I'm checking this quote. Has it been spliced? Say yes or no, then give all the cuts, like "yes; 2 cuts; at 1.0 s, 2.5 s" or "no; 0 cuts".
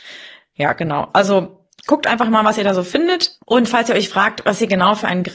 yes; 1 cut; at 3.4 s